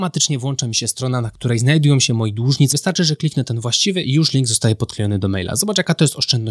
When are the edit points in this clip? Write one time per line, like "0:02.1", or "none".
0:02.7

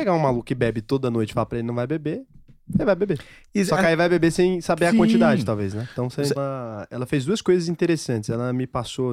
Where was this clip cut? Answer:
0:06.4

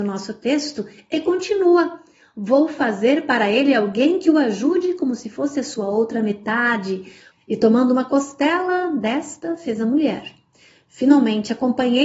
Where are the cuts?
0:07.3

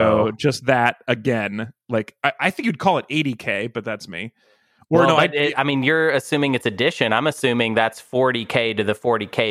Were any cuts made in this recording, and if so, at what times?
none

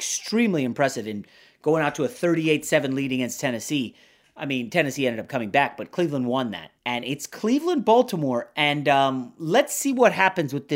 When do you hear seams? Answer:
0:06.8

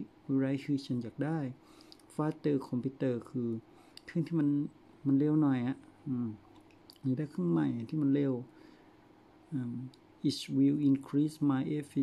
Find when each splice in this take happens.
none

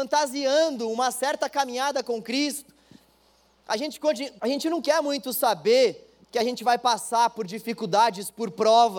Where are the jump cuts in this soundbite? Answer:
0:04.4

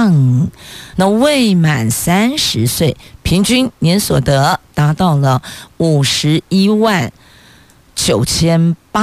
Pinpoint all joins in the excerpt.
0:00.9

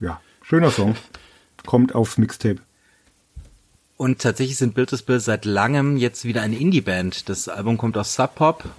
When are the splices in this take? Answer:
none

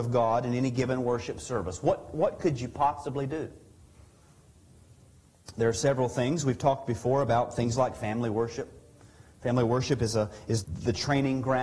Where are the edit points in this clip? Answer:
0:10.6

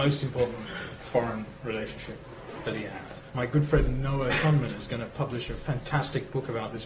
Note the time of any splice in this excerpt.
0:03.3

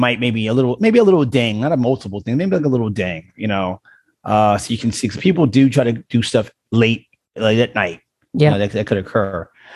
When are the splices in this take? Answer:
none

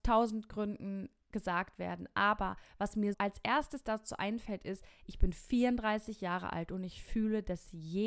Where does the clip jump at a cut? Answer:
0:03.1

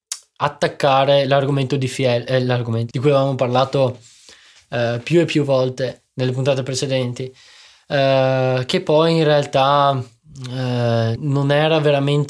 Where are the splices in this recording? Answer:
0:02.9
0:11.2

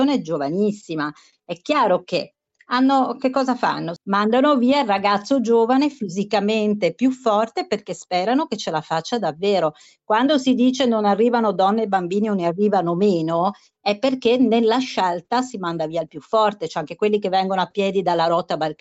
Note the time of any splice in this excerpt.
0:01.3
0:04.0

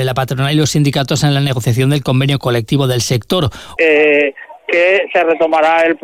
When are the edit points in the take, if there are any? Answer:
0:03.8

